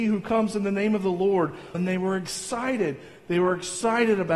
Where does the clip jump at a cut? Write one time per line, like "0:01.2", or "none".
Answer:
0:01.7